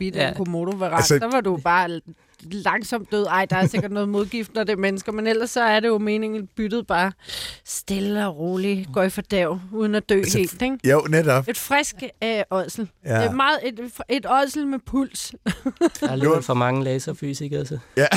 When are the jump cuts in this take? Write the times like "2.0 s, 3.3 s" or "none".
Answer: none